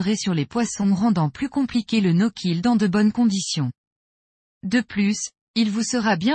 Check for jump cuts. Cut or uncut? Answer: uncut